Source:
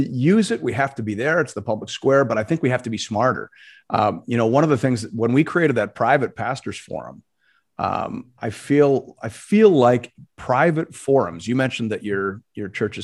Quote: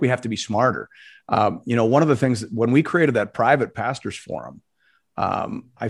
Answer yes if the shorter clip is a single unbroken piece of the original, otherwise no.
yes